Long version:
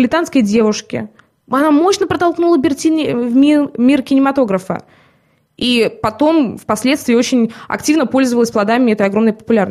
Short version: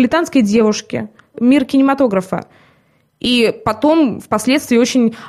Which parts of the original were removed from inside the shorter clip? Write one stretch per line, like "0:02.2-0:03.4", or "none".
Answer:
0:01.3-0:03.7

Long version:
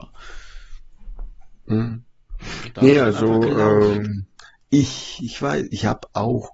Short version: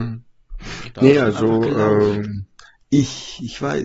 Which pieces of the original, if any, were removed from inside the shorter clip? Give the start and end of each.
none

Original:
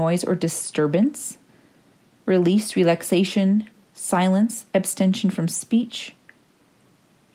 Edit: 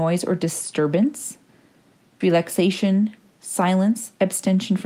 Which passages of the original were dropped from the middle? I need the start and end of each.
0:02.2-0:02.7

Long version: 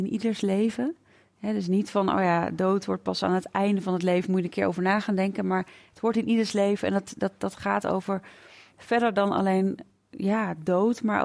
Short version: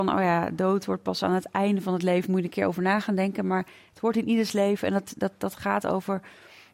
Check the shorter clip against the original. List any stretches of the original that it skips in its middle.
none

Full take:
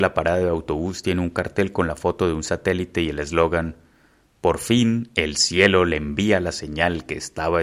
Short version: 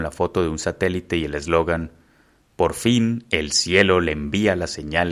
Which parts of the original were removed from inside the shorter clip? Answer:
none

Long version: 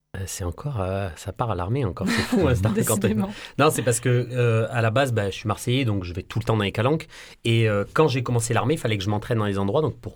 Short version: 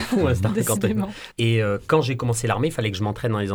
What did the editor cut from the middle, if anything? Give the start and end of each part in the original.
0:03.5-0:07.4

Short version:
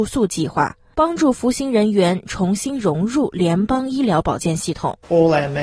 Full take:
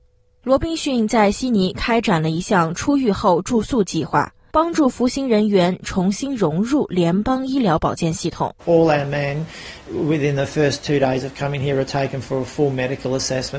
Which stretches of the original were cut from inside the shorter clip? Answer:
none

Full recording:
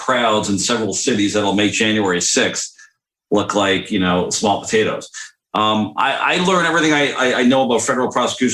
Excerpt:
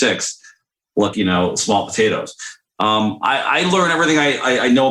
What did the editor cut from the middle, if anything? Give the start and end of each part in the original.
0:03.5-0:03.9

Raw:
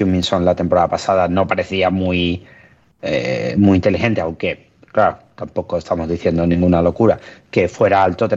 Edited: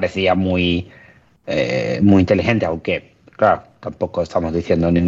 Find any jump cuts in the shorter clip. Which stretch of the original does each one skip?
none

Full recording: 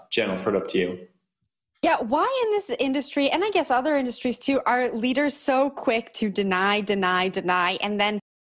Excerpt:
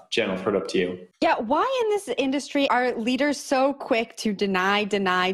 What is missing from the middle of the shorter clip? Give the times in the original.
0:01.1-0:01.7
0:03.3-0:04.6

